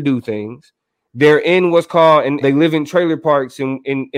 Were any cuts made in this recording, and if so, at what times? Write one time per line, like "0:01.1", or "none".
0:02.4